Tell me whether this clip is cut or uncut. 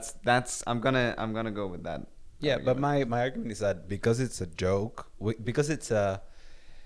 cut